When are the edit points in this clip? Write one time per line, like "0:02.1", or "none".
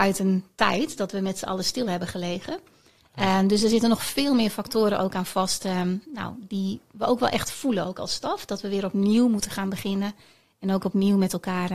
none